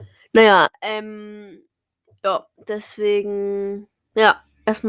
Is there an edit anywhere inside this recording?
no; 0 cuts

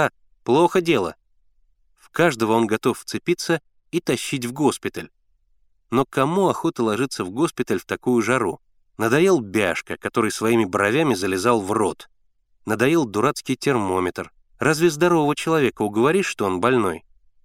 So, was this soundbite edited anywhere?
yes; 2 cuts; at 8.9 s, 14.5 s

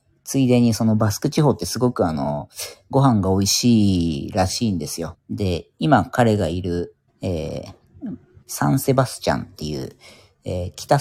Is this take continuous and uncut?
no; 3 cuts; at 5.1 s, 7.1 s, 8.4 s

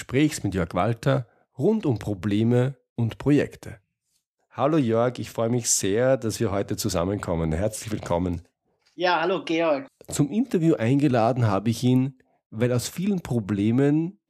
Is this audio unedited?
no; 1 cut; at 9.9 s

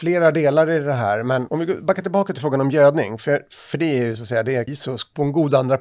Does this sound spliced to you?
yes; 1 cut; at 4.7 s

